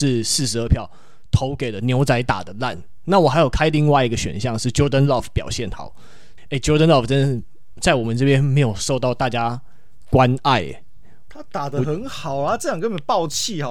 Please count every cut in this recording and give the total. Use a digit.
1